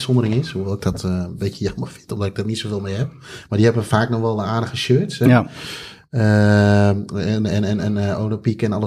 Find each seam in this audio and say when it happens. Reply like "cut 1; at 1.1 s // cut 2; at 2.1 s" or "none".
none